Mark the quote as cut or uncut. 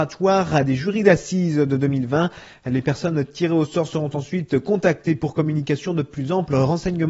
uncut